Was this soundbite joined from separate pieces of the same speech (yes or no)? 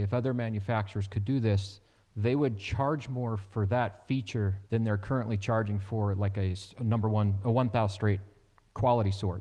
yes